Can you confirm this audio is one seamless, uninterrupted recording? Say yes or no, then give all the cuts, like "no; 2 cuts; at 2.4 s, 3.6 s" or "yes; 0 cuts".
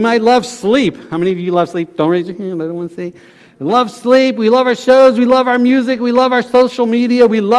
yes; 0 cuts